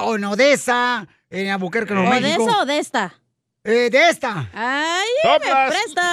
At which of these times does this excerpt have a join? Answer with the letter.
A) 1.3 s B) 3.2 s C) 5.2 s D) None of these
D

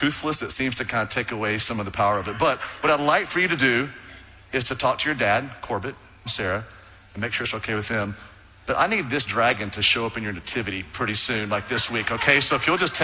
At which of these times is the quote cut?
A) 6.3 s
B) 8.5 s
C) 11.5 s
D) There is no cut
A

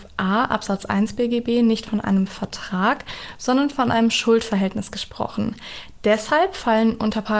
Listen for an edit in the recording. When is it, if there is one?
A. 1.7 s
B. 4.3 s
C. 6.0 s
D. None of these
D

